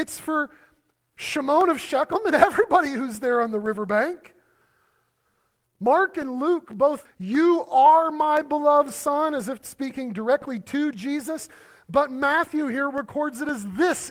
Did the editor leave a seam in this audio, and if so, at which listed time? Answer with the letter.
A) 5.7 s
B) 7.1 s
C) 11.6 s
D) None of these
B